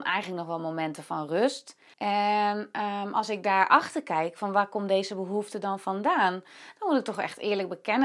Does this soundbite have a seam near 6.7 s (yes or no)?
no